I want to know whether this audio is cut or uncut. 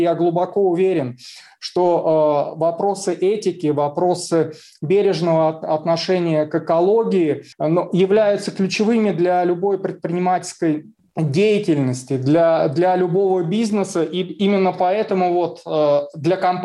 cut